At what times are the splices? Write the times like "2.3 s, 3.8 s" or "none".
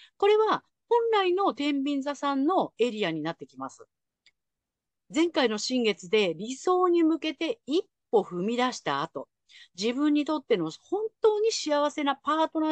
none